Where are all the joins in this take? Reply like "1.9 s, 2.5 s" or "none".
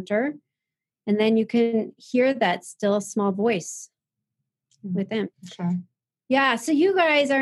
5.3 s